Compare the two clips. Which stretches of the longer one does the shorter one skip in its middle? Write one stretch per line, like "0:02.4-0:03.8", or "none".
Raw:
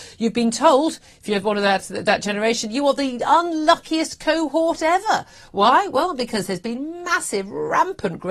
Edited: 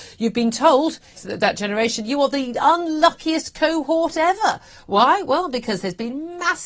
0:01.2-0:01.8